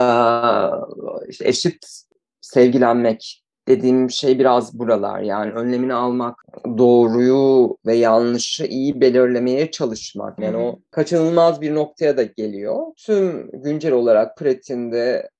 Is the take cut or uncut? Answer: cut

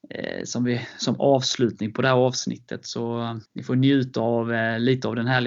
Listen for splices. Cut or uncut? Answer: cut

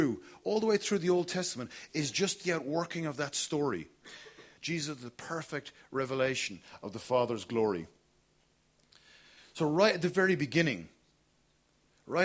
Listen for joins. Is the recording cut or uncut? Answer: cut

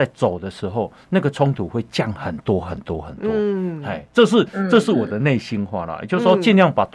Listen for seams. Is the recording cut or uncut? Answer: uncut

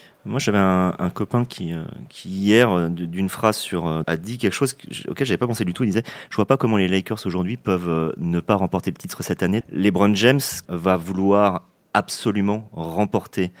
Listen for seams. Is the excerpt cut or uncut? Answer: cut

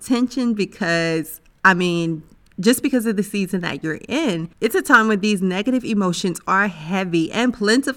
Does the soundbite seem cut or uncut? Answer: cut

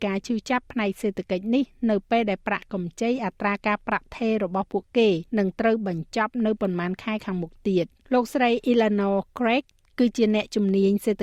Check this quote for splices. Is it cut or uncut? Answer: cut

